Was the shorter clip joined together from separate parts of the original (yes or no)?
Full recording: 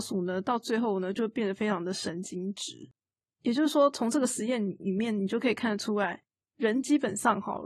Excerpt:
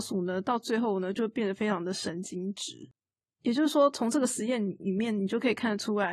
no